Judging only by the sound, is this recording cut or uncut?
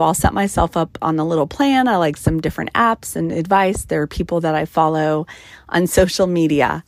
uncut